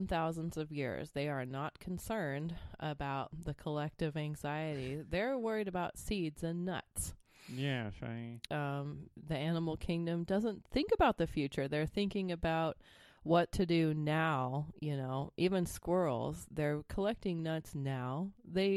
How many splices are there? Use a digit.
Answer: 1